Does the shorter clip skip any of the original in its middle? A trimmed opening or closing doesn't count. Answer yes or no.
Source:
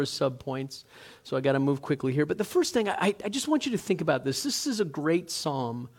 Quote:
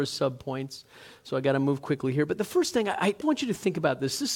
yes